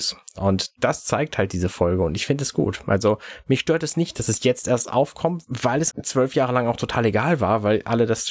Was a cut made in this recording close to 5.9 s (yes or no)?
yes